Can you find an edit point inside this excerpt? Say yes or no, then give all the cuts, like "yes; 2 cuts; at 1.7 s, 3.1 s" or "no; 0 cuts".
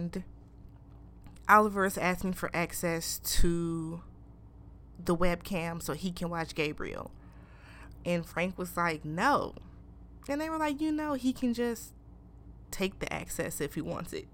no; 0 cuts